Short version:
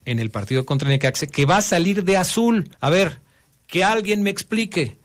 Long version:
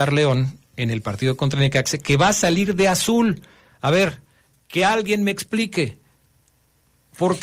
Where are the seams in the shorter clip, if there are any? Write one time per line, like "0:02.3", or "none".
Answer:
0:02.7

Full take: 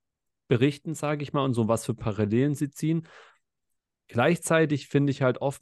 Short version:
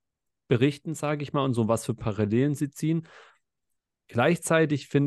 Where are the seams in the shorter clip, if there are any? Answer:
none

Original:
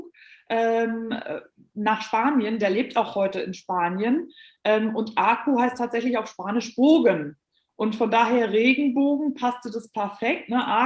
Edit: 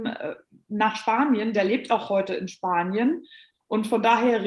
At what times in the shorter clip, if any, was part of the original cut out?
0:03.5

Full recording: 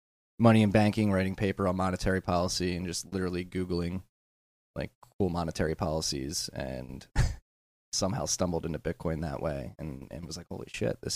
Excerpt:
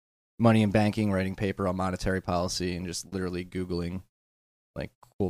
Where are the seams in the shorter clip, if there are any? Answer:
none

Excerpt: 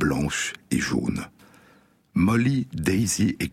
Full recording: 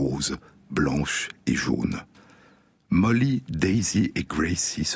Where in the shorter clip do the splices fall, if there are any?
none

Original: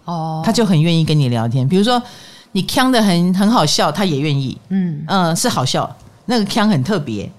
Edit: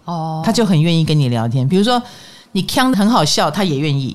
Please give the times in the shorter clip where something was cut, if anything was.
0:02.9

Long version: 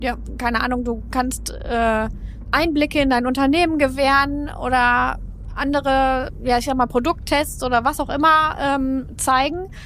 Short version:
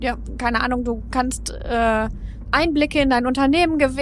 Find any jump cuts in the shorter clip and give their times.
none

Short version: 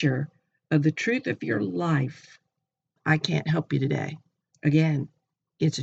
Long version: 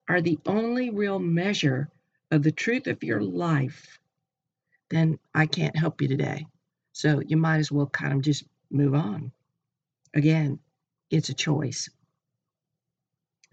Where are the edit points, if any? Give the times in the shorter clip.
0:03.0
0:04.5

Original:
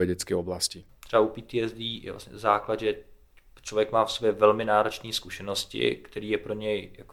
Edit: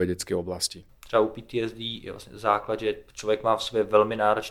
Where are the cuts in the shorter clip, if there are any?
0:03.1

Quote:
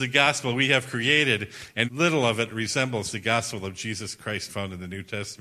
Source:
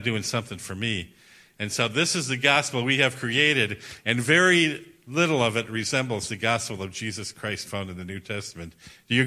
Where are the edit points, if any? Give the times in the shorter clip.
0:01.8

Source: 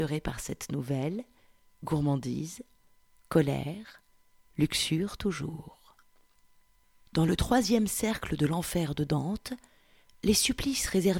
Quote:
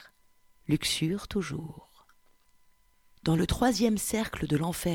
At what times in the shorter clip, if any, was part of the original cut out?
none

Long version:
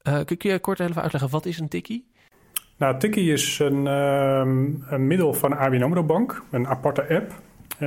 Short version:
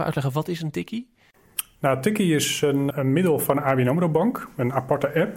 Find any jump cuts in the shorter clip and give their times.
0:02.9

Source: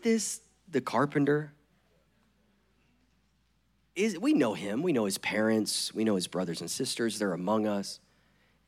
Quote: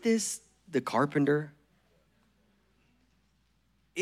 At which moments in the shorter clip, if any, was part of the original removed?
none

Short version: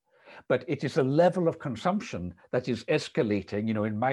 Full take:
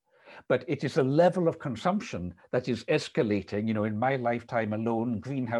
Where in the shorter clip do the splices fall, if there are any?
none

